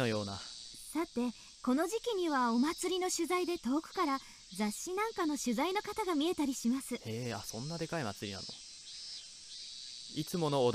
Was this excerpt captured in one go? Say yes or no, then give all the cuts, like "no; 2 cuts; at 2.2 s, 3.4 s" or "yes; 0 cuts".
no; 1 cut; at 1.5 s